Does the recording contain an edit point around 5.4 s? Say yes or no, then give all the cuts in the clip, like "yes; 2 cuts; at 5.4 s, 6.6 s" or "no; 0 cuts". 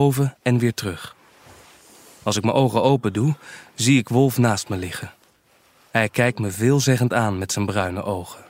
no; 0 cuts